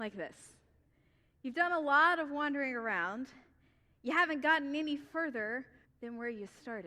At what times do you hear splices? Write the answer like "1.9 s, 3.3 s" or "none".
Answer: 5.8 s